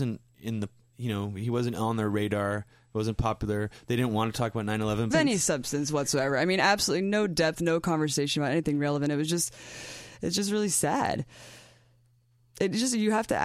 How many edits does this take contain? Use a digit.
1